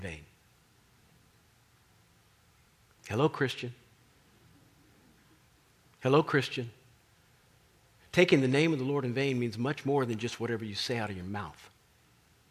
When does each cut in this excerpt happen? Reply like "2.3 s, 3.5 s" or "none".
none